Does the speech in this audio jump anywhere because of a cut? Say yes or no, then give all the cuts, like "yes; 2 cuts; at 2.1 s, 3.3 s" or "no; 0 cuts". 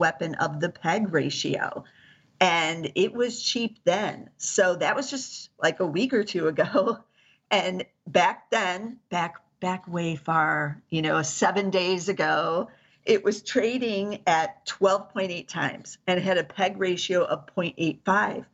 no; 0 cuts